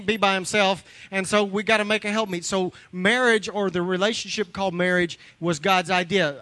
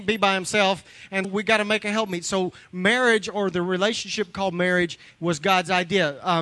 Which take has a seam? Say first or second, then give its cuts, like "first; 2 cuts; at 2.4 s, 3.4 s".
second; 1 cut; at 1.2 s